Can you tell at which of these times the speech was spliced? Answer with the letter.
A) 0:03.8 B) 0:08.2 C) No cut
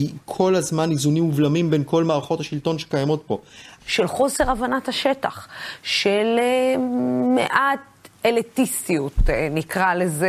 A